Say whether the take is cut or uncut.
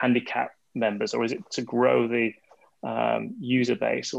uncut